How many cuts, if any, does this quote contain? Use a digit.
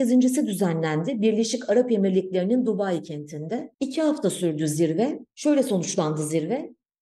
1